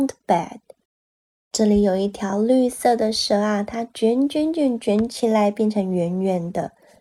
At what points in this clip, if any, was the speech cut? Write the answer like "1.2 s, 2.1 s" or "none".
none